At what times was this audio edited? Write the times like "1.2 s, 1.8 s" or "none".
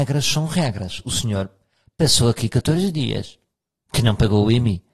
none